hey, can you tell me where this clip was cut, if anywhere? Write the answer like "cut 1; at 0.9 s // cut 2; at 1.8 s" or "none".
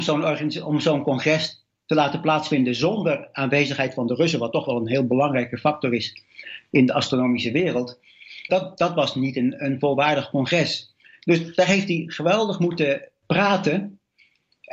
cut 1; at 8.5 s